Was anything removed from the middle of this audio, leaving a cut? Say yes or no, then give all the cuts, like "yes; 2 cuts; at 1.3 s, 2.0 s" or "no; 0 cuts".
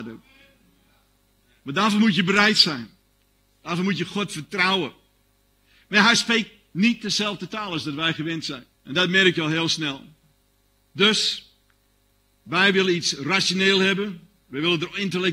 yes; 1 cut; at 8.7 s